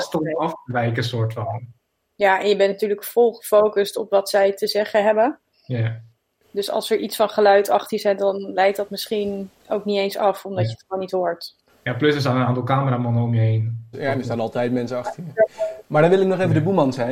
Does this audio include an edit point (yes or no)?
yes